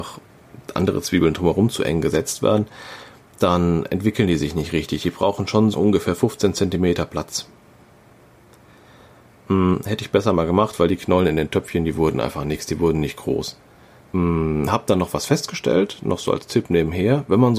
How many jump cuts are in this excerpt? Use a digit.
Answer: 2